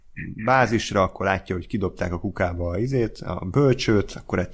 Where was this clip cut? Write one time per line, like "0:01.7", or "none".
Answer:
none